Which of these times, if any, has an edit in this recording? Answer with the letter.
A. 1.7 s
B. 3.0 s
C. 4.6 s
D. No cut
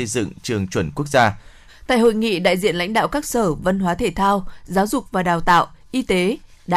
A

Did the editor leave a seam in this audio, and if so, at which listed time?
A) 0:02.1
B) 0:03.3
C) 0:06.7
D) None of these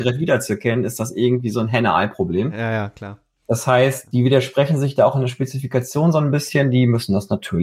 D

